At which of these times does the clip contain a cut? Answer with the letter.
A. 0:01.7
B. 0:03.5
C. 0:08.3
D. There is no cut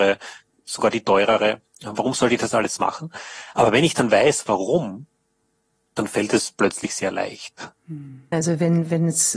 C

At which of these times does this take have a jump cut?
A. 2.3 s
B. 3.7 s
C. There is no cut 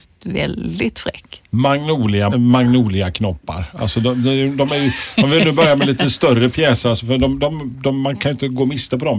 A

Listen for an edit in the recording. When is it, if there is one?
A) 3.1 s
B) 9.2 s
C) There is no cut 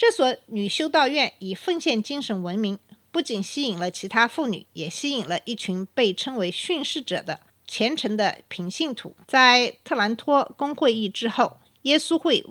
B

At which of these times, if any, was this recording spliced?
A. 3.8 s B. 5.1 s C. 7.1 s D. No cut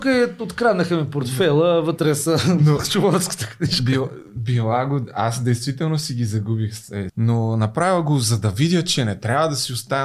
C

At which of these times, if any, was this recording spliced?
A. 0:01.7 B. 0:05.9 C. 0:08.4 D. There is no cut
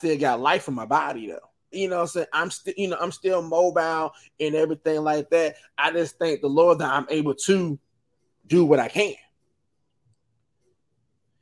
A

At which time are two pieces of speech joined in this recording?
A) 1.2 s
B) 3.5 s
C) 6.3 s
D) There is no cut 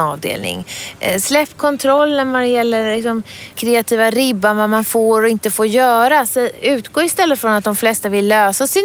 D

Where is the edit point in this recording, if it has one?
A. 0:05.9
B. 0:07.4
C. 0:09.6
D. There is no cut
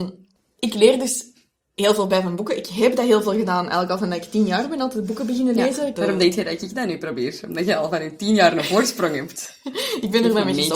A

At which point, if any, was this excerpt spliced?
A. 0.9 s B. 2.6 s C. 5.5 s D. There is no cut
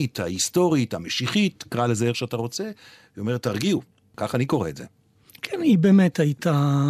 D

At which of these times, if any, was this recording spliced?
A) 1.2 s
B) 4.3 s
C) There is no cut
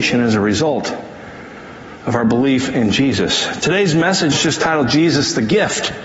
B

